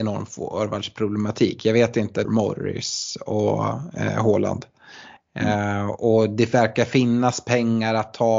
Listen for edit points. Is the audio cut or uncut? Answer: cut